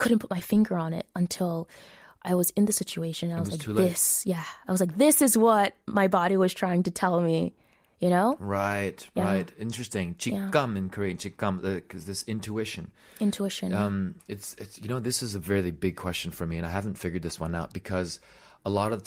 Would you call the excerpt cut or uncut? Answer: uncut